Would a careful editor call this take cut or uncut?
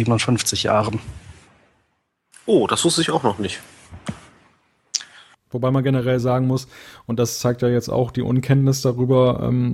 uncut